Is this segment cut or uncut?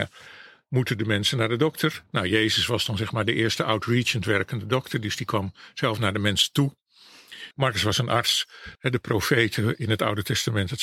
cut